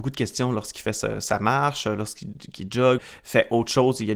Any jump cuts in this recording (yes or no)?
yes